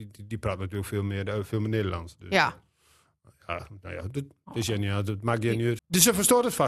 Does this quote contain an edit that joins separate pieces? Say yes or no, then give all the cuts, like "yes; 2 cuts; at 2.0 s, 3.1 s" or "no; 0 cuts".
yes; 1 cut; at 5.8 s